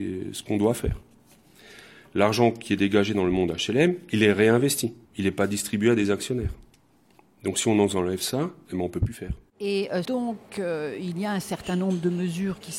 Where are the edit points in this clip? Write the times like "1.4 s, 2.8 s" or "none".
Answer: 5.0 s, 10.0 s